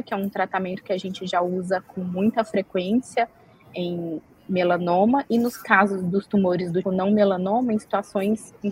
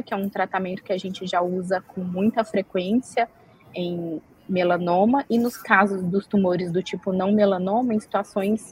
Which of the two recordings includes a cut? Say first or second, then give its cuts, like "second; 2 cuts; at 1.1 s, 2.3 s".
first; 1 cut; at 6.8 s